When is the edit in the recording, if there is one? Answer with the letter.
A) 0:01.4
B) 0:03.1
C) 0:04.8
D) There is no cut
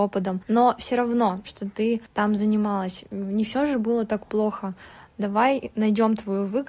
A